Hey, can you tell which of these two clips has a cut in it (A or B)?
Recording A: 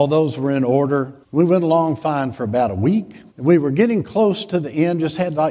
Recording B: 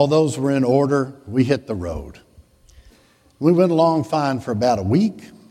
A